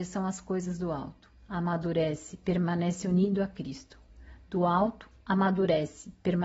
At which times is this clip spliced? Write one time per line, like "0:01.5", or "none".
none

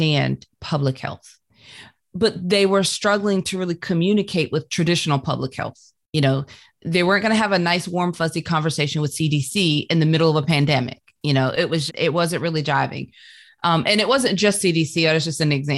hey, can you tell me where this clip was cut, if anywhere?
0:11.9

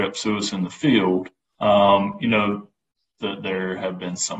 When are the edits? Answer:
0:01.6
0:03.2

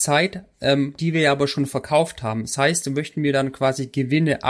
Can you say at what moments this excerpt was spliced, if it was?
0:01.0

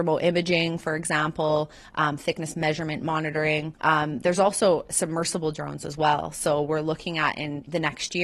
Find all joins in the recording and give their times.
none

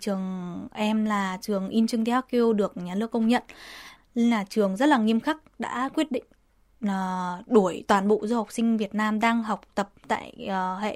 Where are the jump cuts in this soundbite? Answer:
0:04.0

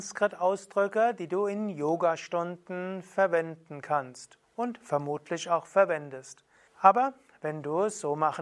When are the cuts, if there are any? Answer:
0:06.7

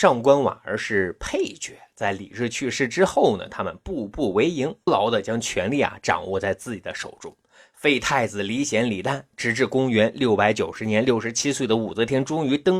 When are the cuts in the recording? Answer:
0:04.9

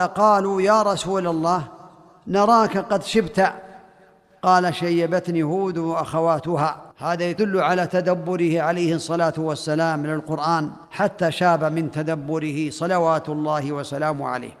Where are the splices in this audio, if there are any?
0:06.9
0:10.8

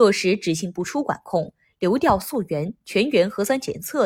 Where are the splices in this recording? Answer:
none

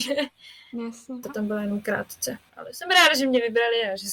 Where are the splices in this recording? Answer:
0:01.2
0:02.5

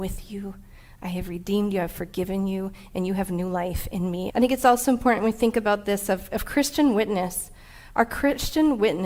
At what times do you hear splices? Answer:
0:04.3

